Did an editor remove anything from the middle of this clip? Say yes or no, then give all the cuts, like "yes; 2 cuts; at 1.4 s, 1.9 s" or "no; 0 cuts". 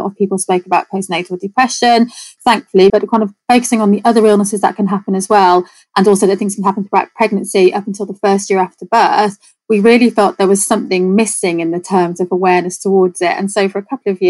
yes; 1 cut; at 2.9 s